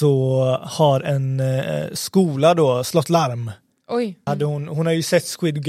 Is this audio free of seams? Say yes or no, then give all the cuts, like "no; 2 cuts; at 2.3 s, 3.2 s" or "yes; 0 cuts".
no; 1 cut; at 4.3 s